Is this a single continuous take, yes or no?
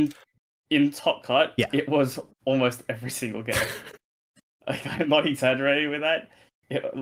yes